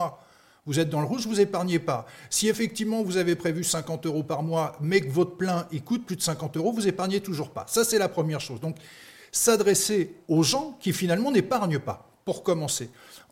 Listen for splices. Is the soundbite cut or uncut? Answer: uncut